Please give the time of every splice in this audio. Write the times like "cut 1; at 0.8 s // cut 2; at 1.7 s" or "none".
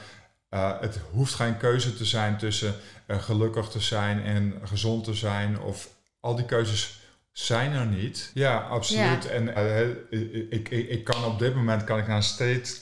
cut 1; at 8.3 s // cut 2; at 9.6 s